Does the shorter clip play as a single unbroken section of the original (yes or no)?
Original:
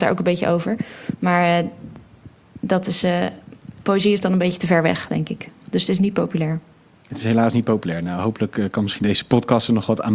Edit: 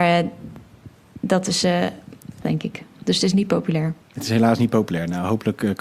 no